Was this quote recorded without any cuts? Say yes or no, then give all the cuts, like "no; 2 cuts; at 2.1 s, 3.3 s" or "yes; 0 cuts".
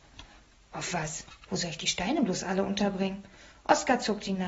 no; 1 cut; at 1.4 s